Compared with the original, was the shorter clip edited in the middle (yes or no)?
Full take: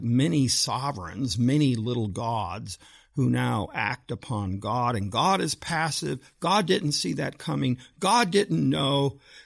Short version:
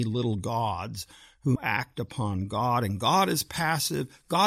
yes